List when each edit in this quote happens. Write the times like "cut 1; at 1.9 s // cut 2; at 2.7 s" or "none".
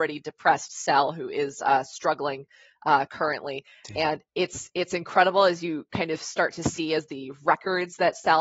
cut 1; at 4.3 s